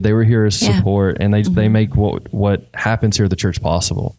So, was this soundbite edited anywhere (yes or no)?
yes